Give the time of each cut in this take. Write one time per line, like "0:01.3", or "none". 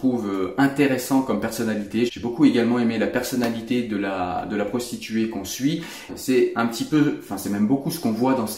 0:02.1
0:06.1